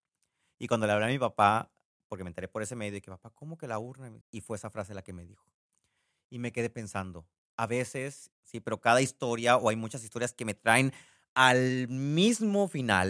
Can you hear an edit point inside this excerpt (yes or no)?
yes